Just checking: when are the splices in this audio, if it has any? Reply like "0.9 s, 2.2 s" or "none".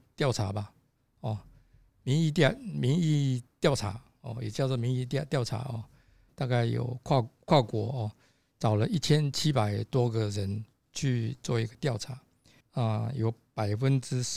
6.3 s, 12.6 s